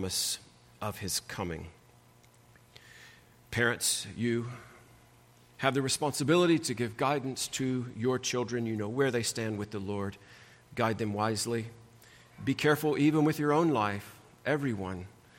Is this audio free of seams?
yes; 0 cuts

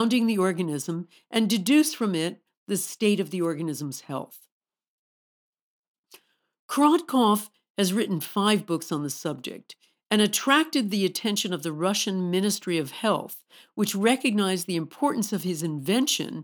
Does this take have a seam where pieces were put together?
no; 0 cuts

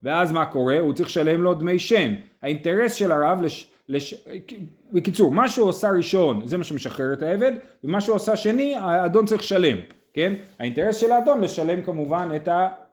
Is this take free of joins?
yes; 0 cuts

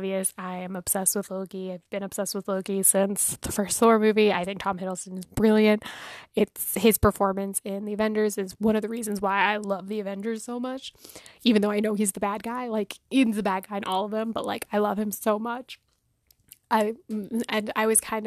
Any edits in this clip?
no; 0 cuts

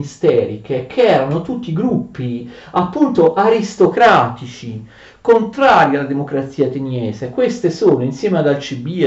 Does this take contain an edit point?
no; 0 cuts

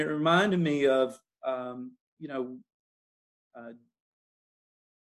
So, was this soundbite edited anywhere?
no; 0 cuts

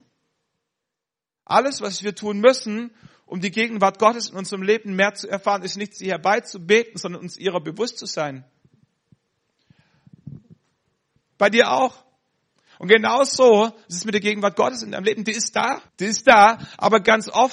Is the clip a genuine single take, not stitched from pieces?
no; 2 cuts; at 11.2 s, 15.9 s

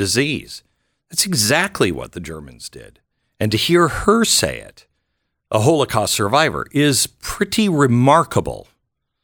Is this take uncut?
yes; 0 cuts

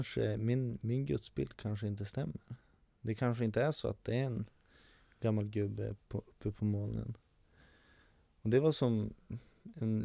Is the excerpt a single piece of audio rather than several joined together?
yes; 0 cuts

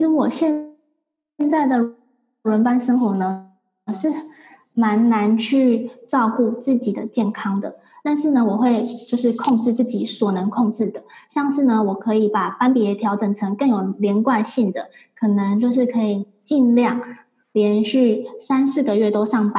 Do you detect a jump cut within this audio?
no; 0 cuts

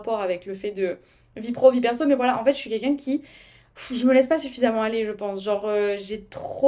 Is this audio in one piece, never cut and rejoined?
yes; 0 cuts

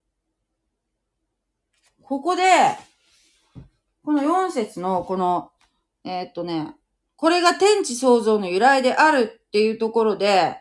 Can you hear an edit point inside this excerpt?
no; 0 cuts

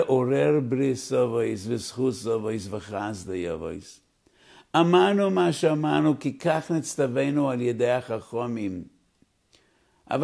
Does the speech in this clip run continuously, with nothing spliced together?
yes; 0 cuts

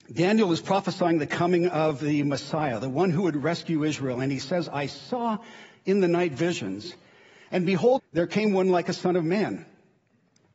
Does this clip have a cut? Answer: yes; 1 cut; at 8.0 s

